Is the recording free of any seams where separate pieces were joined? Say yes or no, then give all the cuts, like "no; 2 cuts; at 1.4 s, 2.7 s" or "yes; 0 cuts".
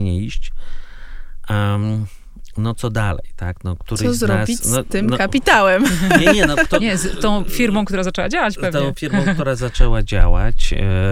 yes; 0 cuts